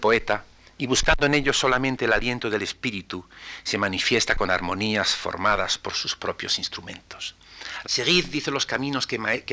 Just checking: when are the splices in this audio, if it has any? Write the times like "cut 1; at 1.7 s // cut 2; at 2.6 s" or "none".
cut 1; at 7.8 s